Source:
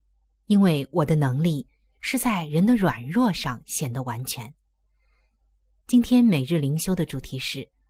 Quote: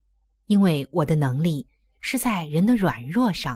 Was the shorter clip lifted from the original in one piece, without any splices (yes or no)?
yes